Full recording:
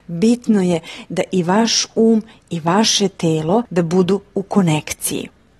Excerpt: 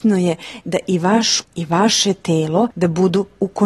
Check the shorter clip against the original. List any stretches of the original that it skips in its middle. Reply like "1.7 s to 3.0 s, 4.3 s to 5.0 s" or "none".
1.9 s to 2.4 s

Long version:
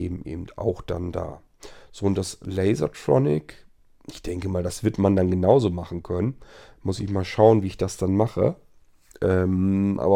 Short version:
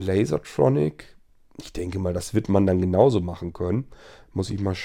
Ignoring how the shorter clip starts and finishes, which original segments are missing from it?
none

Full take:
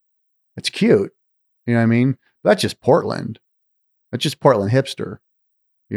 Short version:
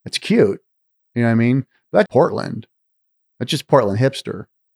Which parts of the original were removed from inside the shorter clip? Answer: 2.6 s to 2.8 s

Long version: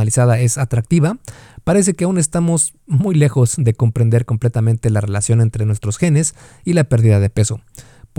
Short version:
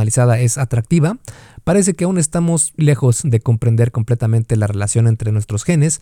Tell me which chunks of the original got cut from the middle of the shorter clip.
2.8 s to 3.1 s

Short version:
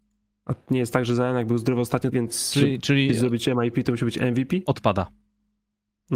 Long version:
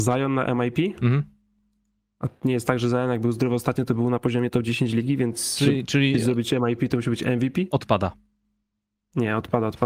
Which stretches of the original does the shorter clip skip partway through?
3.9 s to 5.2 s

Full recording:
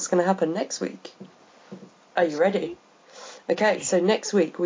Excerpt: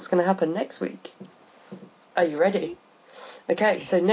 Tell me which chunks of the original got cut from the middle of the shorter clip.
none

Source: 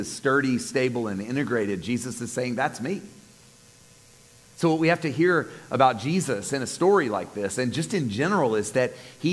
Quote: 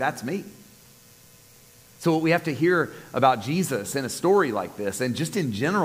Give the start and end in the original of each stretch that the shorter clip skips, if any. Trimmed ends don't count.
none

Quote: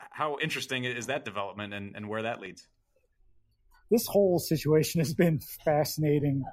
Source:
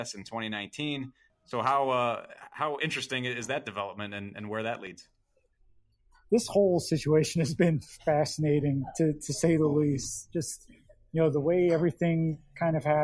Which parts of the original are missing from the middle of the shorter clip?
none

